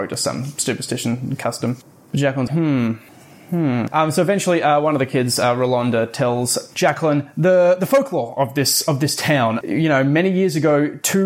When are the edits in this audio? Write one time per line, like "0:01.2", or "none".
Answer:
0:02.5